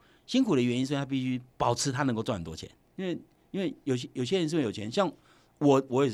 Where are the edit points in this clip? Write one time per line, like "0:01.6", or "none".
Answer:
0:01.5
0:02.9